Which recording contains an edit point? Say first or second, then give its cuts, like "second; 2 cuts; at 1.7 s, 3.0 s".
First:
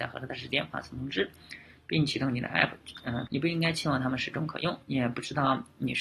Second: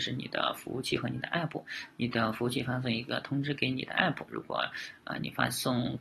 first; 2 cuts; at 3.3 s, 4.8 s